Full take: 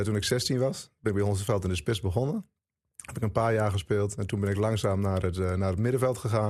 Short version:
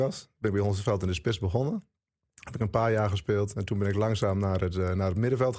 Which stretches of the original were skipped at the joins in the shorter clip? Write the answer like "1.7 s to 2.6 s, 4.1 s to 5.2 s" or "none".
none